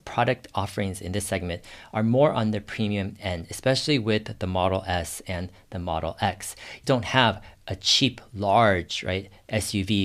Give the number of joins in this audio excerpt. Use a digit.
1